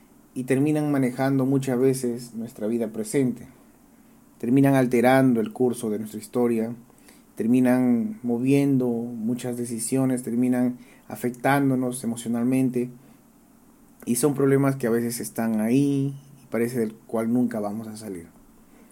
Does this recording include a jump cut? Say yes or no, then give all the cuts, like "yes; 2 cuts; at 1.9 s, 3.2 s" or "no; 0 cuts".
no; 0 cuts